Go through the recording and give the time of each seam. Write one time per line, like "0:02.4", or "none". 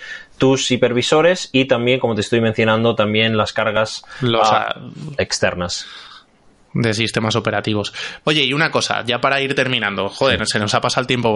0:08.2